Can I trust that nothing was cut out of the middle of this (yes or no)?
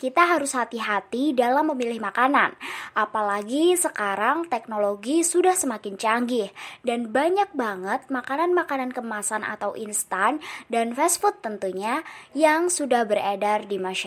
yes